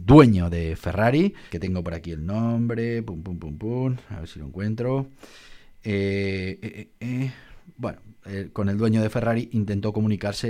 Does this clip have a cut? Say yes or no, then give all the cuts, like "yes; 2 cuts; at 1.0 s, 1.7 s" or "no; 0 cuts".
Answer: yes; 1 cut; at 1.5 s